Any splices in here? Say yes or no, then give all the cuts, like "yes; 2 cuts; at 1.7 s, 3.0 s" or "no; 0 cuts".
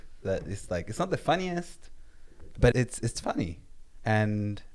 yes; 1 cut; at 2.7 s